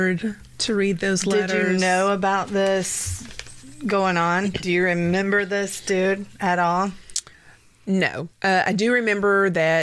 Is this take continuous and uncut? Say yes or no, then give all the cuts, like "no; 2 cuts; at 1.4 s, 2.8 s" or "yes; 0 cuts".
no; 1 cut; at 8.3 s